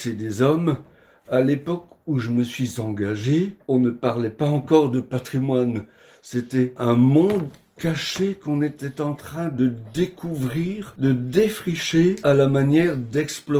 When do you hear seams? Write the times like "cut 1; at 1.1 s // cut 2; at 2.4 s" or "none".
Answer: none